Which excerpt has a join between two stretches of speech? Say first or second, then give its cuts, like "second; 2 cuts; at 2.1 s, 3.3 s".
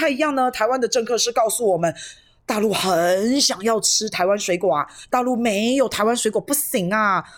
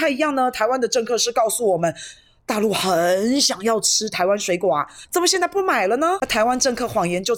second; 1 cut; at 5.1 s